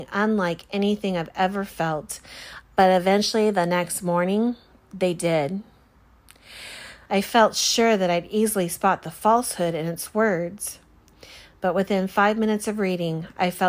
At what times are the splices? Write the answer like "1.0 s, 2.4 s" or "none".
2.6 s, 7.1 s